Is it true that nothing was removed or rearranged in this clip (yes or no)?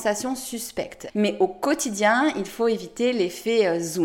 no